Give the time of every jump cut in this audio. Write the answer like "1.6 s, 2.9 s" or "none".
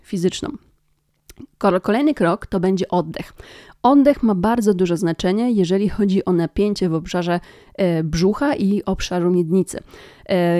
none